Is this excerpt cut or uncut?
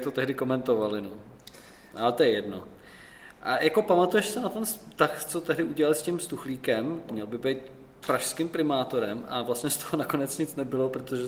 cut